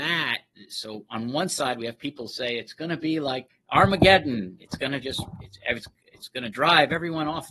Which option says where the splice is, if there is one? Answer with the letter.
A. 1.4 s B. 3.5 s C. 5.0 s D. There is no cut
B